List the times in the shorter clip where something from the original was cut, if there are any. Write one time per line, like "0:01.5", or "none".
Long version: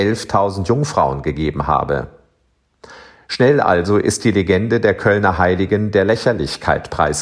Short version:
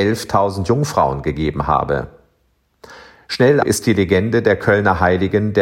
0:03.6